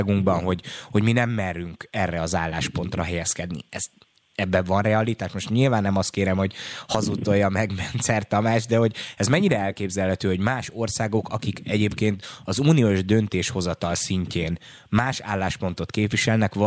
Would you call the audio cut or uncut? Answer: uncut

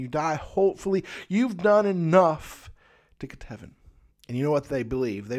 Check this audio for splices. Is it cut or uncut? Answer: cut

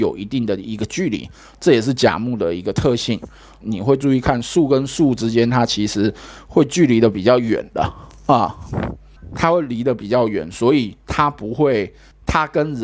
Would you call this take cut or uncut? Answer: cut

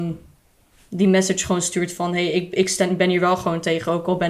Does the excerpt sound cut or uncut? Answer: uncut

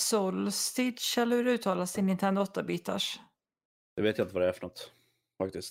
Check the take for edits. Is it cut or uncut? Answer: uncut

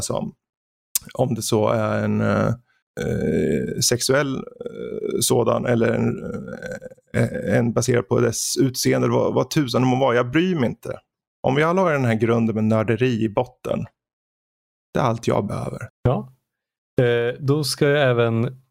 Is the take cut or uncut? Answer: cut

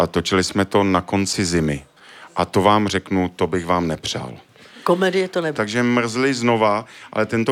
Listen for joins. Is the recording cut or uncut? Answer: cut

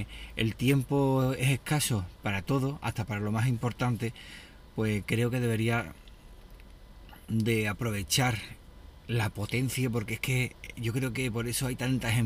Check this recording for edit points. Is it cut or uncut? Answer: uncut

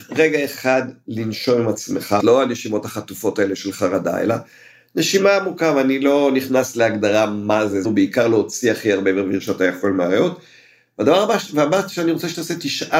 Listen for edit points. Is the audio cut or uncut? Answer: cut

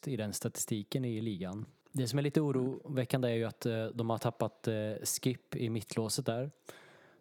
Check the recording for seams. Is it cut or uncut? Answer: uncut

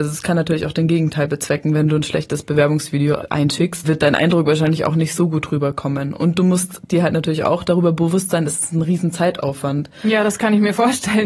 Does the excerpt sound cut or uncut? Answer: cut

